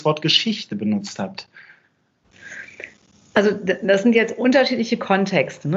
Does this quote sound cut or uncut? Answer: uncut